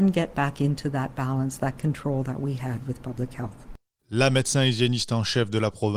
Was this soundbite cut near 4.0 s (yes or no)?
yes